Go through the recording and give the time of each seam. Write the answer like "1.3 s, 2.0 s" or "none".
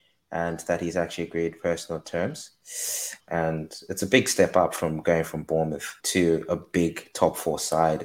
3.2 s, 6.0 s